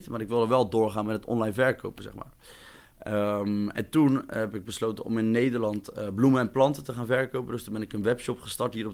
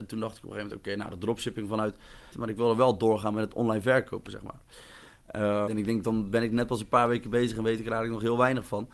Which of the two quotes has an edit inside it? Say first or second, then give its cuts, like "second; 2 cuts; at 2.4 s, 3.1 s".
second; 2 cuts; at 2.3 s, 5.7 s